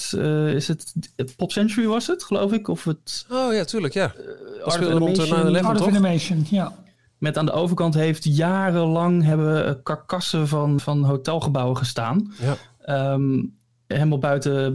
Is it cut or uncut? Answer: cut